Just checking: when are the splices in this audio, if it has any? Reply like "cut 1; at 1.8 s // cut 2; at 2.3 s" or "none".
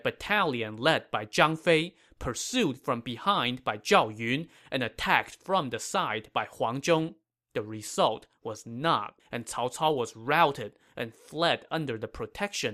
cut 1; at 9.2 s